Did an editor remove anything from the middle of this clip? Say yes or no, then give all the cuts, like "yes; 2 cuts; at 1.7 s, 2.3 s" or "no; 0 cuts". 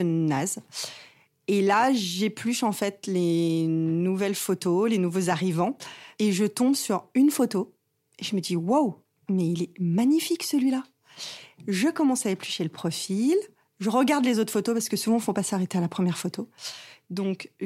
no; 0 cuts